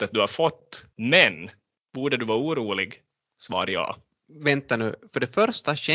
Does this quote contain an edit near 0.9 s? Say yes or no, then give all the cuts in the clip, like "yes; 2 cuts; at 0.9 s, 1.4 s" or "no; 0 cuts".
yes; 1 cut; at 0.9 s